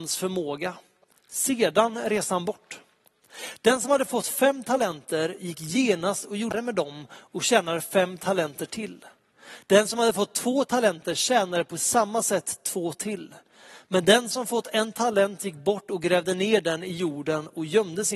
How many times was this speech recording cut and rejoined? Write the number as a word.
zero